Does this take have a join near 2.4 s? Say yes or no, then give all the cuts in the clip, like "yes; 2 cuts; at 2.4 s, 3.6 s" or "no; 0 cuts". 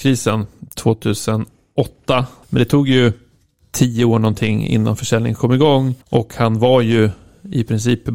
yes; 2 cuts; at 2.4 s, 6.0 s